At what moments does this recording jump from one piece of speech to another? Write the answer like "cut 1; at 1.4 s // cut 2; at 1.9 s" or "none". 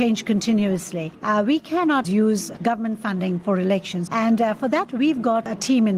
cut 1; at 2.0 s // cut 2; at 4.1 s